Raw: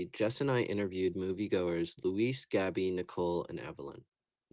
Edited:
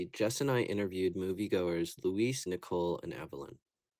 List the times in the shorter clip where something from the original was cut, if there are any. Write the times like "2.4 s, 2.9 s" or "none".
2.5 s